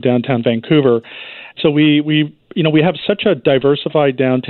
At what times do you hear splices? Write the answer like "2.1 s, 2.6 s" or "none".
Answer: 1.6 s